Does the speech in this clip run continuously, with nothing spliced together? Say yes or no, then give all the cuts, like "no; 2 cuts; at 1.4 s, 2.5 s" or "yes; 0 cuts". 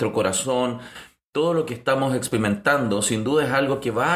yes; 0 cuts